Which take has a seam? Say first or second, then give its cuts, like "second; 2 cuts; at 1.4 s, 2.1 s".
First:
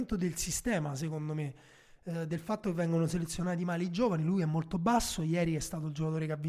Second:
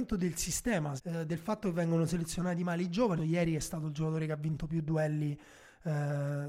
second; 2 cuts; at 1.0 s, 3.2 s